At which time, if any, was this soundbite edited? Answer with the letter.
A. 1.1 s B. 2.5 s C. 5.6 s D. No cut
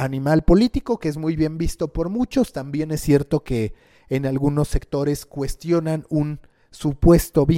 D